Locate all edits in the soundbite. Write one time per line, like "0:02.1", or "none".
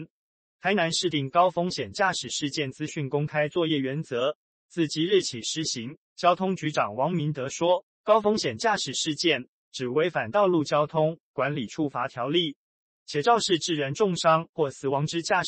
0:01.1
0:06.0
0:07.9